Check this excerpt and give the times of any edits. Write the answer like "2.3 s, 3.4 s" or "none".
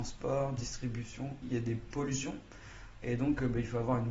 1.4 s, 3.0 s

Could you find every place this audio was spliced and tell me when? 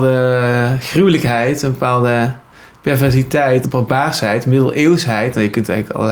3.6 s

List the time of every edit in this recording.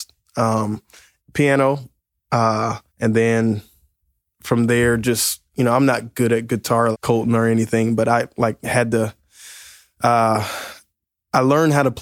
1.2 s, 2.9 s, 6.9 s

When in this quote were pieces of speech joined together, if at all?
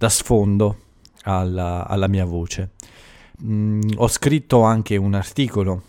3.4 s

